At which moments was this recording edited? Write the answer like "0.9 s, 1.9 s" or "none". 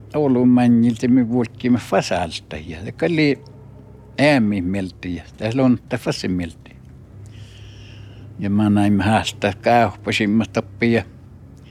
none